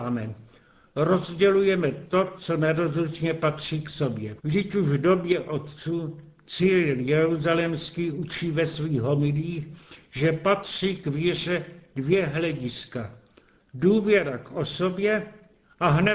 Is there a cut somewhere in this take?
yes; 1 cut; at 4.4 s

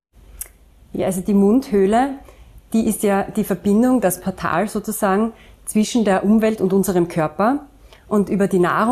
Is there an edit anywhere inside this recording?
no; 0 cuts

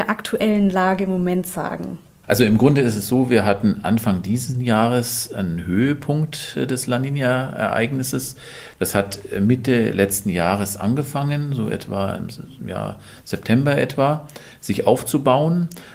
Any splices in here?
no; 0 cuts

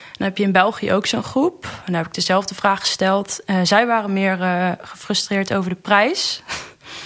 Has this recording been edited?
no; 0 cuts

